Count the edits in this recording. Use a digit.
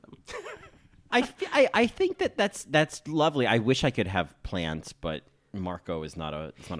1